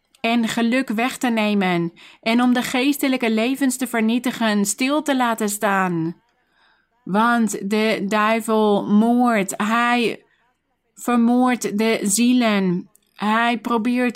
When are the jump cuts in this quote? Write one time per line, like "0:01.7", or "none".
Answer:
none